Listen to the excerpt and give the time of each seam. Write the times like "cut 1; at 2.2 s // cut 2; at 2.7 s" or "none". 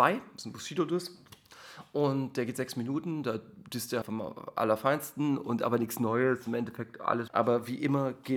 cut 1; at 4.0 s // cut 2; at 7.3 s